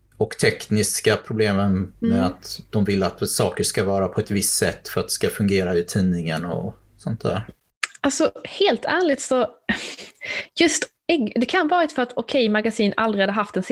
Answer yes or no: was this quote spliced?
no